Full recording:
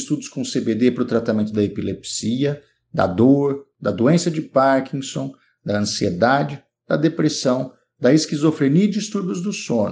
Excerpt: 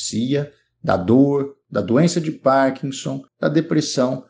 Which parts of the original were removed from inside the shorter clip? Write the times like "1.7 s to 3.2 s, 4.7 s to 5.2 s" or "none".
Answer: 5.4 s to 6.8 s